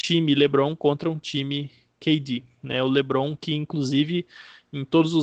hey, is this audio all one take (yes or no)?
yes